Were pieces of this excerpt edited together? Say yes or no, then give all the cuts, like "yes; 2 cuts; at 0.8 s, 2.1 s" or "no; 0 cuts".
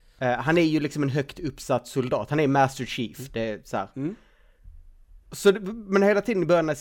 yes; 1 cut; at 5.2 s